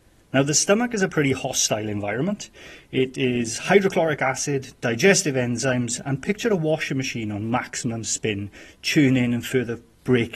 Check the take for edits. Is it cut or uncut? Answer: uncut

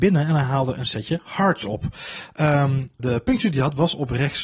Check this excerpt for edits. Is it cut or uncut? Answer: cut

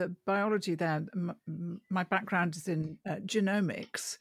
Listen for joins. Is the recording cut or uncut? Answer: uncut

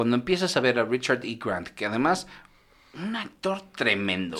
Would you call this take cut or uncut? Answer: uncut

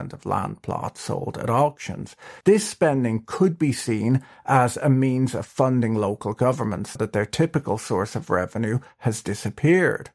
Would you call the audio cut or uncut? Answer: cut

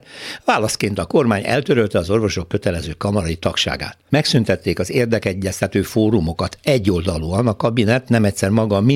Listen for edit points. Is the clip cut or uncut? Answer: cut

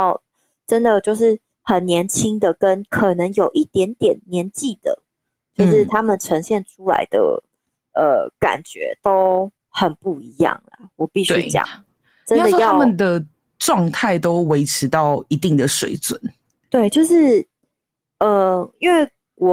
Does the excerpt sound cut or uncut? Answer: uncut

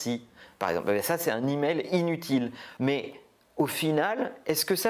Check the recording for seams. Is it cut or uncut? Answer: cut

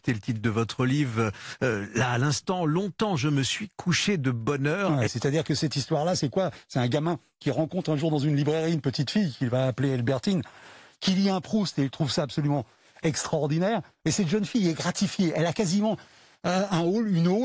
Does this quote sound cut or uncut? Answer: cut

